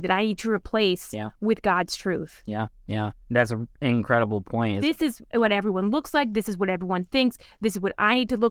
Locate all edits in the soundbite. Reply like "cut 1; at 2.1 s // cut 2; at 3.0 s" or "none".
cut 1; at 3.2 s // cut 2; at 4.8 s